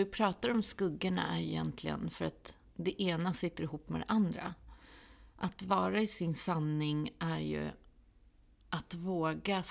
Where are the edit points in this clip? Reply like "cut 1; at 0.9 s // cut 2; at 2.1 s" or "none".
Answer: none